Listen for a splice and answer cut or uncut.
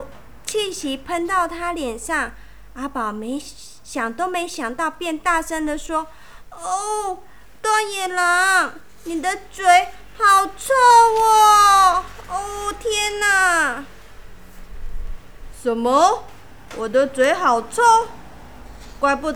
uncut